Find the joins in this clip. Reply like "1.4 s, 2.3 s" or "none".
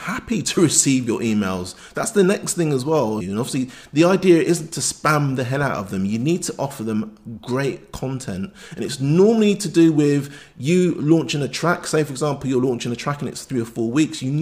3.2 s